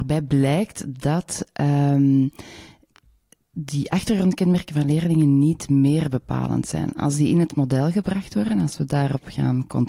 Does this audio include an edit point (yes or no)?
no